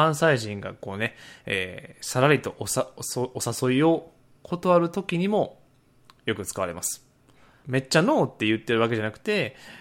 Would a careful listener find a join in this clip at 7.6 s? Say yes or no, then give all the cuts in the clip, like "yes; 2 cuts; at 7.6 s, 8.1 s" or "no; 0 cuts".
yes; 1 cut; at 7.6 s